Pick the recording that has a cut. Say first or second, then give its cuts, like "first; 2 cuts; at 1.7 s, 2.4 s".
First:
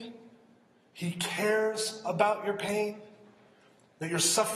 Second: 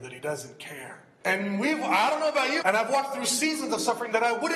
second; 2 cuts; at 1.2 s, 2.6 s